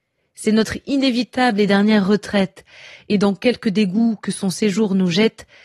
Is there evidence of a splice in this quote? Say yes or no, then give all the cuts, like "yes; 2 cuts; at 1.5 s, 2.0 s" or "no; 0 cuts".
no; 0 cuts